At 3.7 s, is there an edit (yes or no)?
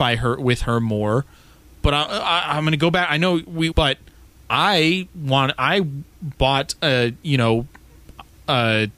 yes